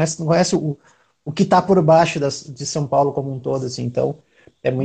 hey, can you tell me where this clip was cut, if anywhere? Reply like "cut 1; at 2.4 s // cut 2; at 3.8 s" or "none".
none